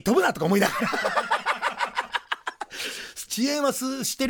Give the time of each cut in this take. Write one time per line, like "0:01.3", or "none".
0:03.3